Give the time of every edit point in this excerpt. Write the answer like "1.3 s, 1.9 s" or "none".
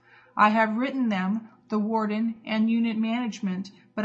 none

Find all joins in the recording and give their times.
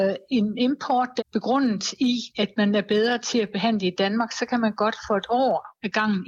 1.2 s

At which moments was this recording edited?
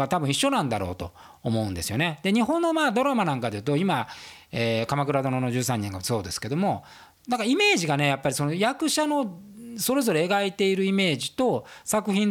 none

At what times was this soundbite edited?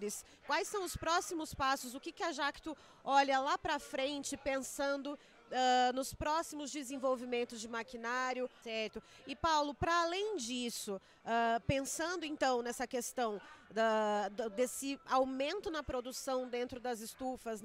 8.6 s

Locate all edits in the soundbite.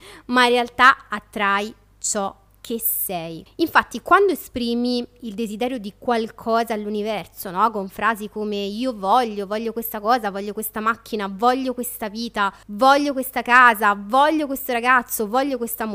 3.5 s, 12.6 s

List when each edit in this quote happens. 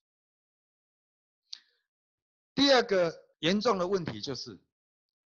3.3 s

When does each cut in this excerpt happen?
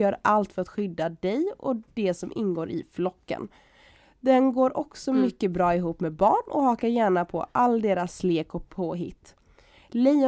none

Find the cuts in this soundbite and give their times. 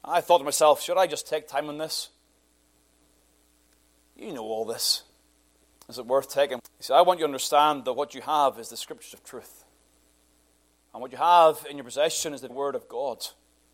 6.6 s, 12.5 s

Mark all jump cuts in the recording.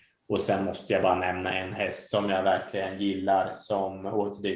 none

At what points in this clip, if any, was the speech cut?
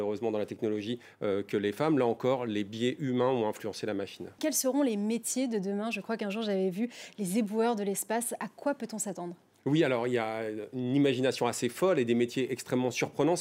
4.4 s

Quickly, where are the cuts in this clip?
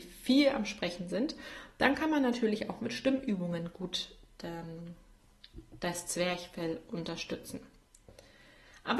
none

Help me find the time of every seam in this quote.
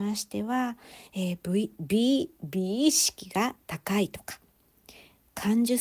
none

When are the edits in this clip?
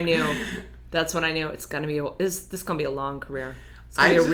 none

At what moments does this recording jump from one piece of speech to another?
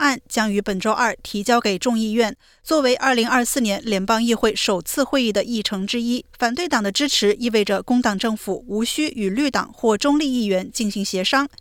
6.3 s

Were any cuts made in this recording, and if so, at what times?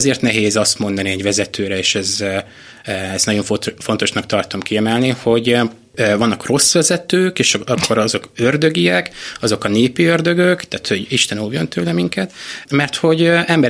none

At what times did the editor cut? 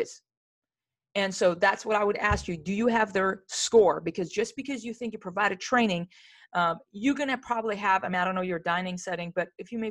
none

